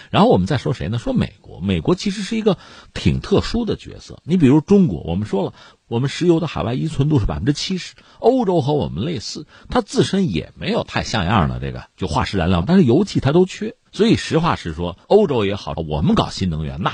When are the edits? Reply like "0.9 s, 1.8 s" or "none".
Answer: 12.6 s, 13.8 s, 15.8 s